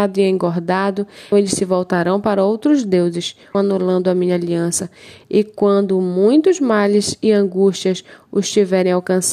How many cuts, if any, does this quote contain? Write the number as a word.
two